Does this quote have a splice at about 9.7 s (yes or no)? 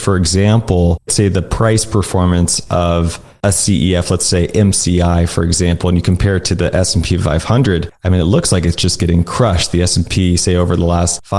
no